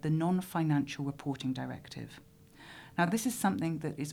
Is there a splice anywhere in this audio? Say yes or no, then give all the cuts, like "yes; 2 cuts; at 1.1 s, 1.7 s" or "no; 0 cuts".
no; 0 cuts